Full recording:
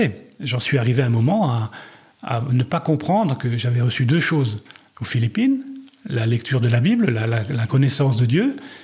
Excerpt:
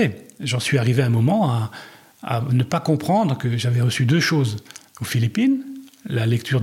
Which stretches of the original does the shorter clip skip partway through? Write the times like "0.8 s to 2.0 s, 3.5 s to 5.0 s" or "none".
none